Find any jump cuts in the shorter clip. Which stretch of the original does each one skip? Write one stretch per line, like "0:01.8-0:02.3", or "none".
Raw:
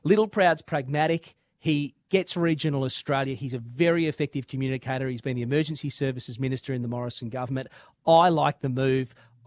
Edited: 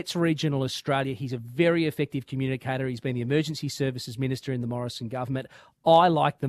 none